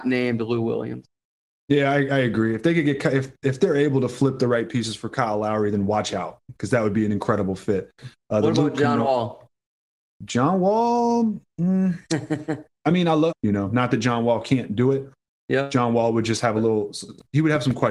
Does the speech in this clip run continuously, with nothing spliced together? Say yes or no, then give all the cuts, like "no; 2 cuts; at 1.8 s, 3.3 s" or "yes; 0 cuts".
no; 1 cut; at 13.3 s